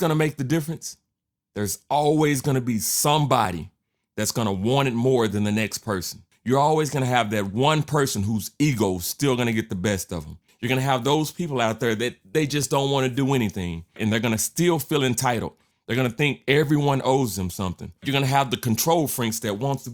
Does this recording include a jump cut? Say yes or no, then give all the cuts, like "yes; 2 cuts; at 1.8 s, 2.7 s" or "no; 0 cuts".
no; 0 cuts